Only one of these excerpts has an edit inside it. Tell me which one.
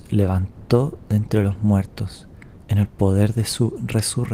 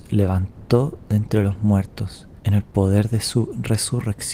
second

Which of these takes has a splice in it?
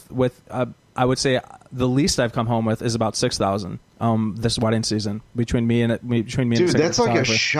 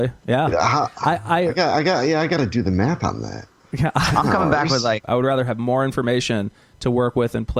second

